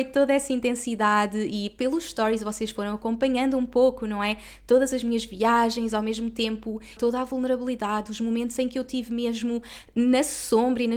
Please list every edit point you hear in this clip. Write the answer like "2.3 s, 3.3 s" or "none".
7.0 s